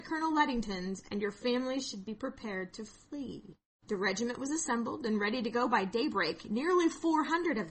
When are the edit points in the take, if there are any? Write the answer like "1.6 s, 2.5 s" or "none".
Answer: none